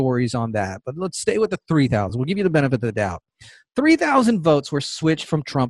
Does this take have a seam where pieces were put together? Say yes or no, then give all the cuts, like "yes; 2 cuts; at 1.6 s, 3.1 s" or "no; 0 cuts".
no; 0 cuts